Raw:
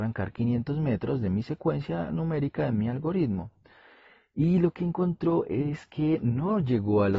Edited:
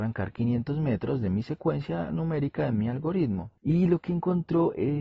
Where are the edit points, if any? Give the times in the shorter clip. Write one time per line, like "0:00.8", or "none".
0:03.6